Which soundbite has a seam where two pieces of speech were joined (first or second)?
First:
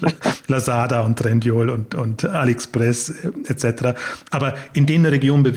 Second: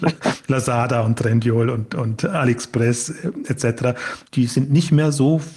second